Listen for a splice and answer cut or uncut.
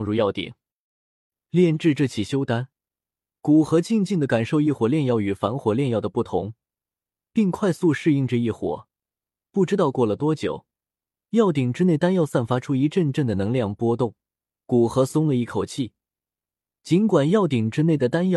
uncut